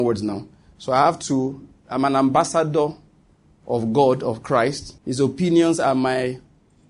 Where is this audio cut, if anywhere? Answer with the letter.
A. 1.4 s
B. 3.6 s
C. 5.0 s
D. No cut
C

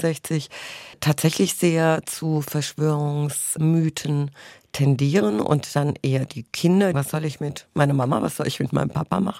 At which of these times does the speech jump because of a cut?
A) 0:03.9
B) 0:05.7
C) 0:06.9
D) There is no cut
C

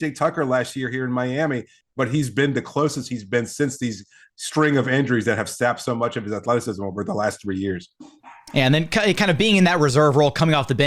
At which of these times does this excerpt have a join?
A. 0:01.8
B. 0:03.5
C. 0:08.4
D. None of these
A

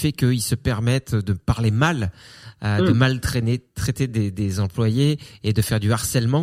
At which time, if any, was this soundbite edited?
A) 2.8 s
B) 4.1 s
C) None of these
C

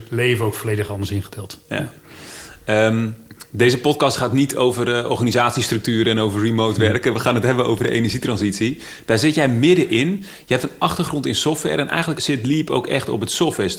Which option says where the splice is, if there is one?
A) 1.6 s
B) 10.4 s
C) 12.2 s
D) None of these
C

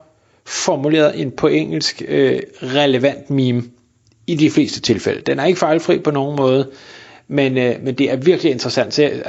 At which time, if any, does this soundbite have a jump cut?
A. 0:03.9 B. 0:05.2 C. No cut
C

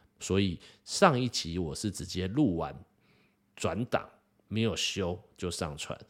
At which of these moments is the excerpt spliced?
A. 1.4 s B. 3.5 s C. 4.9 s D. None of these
D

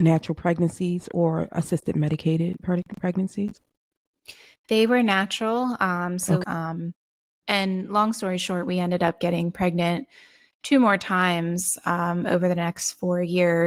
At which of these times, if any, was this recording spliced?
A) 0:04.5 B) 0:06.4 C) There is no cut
B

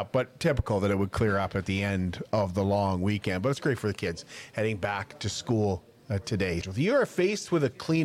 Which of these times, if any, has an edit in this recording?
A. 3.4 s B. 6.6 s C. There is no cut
B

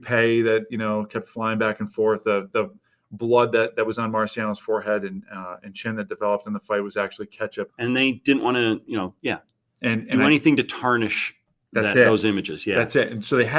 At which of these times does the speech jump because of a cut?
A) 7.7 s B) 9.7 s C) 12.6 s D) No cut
A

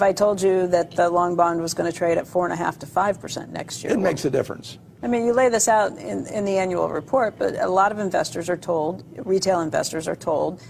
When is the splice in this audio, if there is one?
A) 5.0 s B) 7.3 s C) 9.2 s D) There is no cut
A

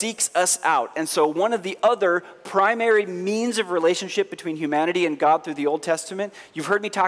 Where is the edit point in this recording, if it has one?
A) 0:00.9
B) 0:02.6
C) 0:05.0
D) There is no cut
D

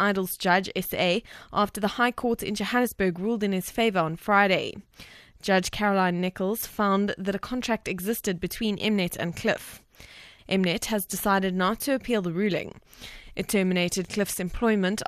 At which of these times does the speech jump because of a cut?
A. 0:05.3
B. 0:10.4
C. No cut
B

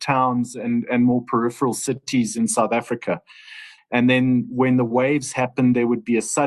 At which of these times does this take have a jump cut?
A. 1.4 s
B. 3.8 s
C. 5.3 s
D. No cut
B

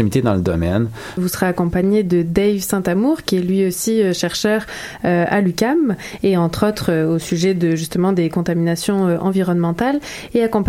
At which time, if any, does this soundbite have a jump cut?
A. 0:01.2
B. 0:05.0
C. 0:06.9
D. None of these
A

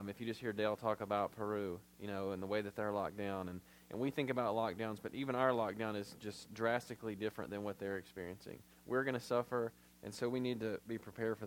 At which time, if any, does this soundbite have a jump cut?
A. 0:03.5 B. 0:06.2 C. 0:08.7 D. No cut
C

